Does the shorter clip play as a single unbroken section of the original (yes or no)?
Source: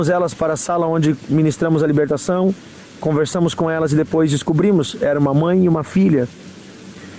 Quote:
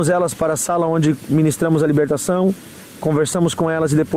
yes